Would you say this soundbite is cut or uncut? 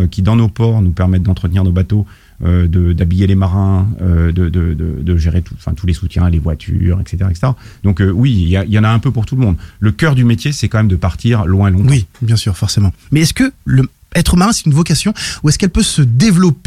uncut